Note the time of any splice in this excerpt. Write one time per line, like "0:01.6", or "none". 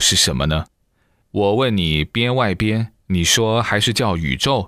0:01.2
0:03.0